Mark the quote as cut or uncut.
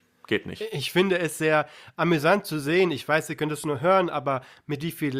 uncut